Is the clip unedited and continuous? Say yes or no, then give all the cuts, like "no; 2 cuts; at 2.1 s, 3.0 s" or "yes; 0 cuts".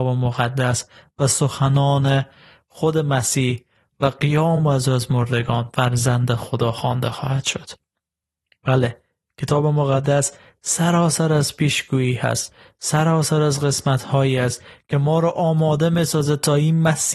yes; 0 cuts